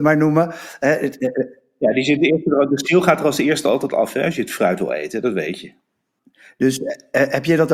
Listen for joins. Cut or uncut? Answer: uncut